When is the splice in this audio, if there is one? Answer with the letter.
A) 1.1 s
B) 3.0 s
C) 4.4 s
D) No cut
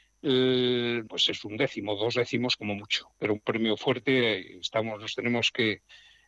A